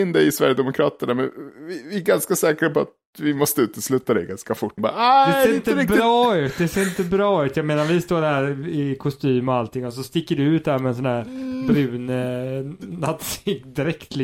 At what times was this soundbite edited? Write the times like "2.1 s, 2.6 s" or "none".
4.8 s